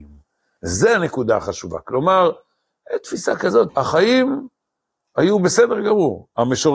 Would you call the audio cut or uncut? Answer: cut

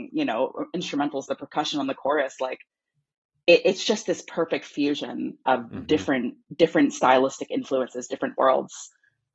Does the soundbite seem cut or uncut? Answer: uncut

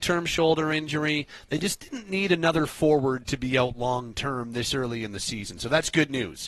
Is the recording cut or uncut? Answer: uncut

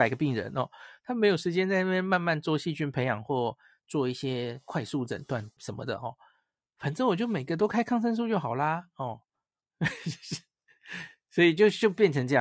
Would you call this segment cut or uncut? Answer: cut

